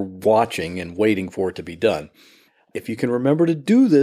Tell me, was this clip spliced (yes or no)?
yes